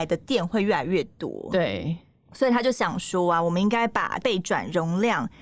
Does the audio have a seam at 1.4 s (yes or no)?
no